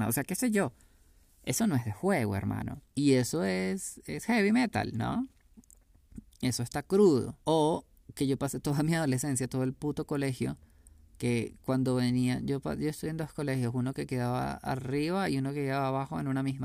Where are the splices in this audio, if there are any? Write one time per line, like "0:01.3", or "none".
0:02.9
0:07.4